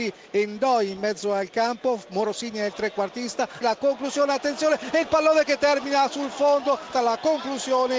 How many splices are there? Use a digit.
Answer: 2